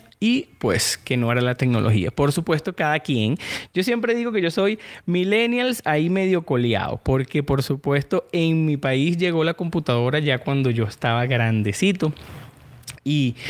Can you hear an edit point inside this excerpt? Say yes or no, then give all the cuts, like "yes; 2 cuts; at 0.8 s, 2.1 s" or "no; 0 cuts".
no; 0 cuts